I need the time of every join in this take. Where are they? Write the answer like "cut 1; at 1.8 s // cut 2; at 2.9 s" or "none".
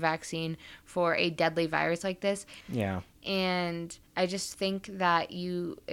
cut 1; at 2.6 s // cut 2; at 4.1 s